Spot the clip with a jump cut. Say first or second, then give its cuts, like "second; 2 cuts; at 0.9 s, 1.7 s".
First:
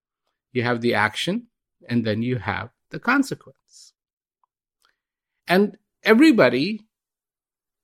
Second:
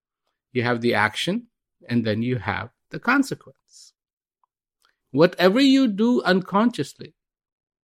second; 1 cut; at 5.0 s